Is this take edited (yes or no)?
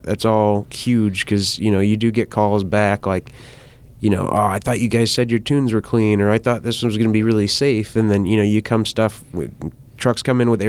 no